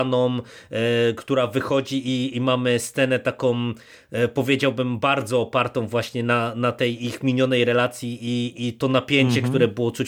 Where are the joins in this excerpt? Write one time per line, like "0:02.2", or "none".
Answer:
none